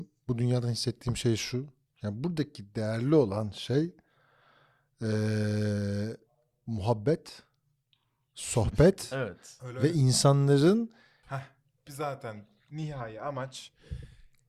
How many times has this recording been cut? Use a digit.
1